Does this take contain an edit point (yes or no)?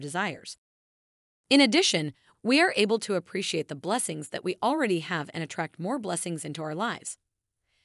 yes